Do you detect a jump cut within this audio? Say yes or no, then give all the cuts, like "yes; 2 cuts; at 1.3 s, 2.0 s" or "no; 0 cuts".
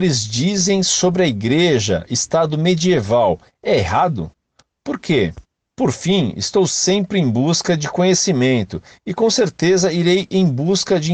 no; 0 cuts